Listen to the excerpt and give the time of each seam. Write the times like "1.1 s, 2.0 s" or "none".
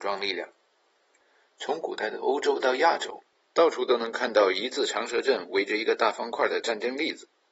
none